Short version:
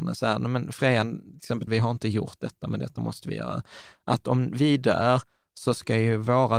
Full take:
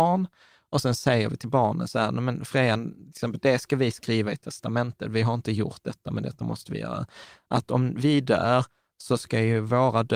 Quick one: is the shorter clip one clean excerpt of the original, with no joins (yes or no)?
no